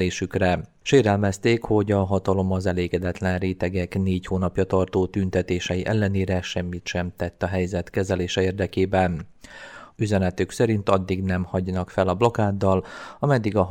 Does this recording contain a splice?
yes; 1 cut; at 9.9 s

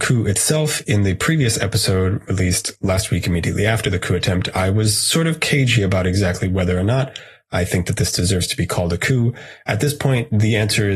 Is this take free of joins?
yes; 0 cuts

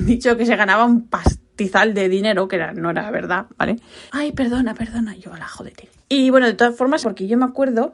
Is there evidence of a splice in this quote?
yes; 2 cuts; at 4.1 s, 7.0 s

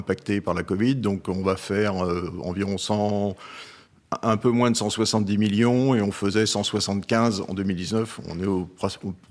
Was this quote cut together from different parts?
no; 0 cuts

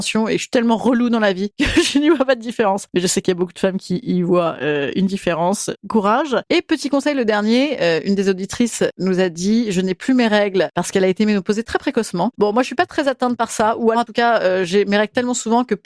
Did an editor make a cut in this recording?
yes; 2 cuts; at 12.3 s, 13.9 s

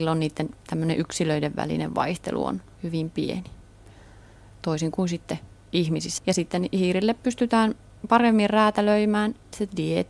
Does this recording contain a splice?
yes; 1 cut; at 6.2 s

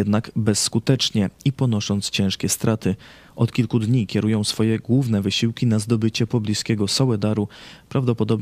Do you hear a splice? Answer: no; 0 cuts

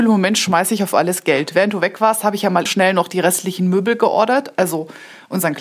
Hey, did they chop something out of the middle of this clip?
yes; 1 cut; at 2.7 s

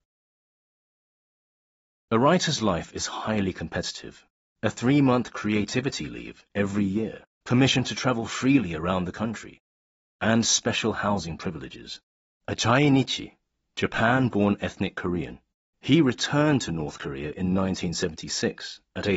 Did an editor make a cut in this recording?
yes; 3 cuts; at 4.6 s, 7.3 s, 12.3 s

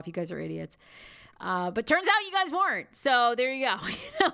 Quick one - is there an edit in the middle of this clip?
no; 0 cuts

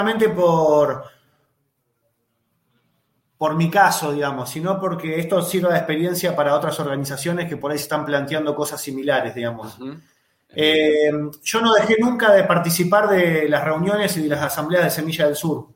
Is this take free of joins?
yes; 0 cuts

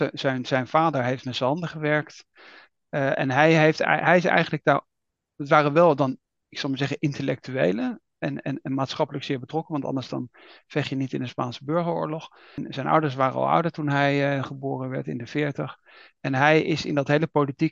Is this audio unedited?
yes; 0 cuts

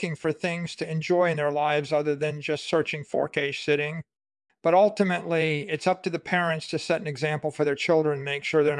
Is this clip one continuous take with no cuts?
yes; 0 cuts

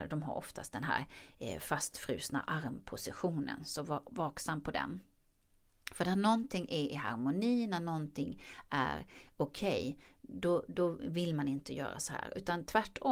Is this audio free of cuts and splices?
yes; 0 cuts

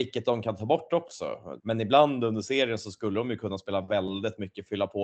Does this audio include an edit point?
yes; 1 cut; at 1.6 s

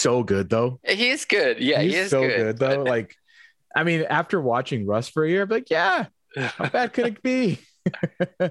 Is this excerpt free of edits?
yes; 0 cuts

